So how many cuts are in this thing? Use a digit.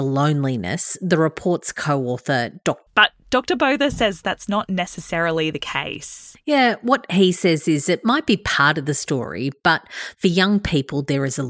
1